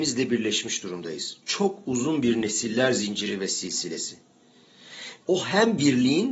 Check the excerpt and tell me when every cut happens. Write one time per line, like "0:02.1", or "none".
0:05.2